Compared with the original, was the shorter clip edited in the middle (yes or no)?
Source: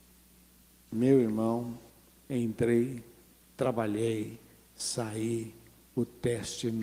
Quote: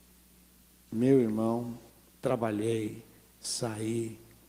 yes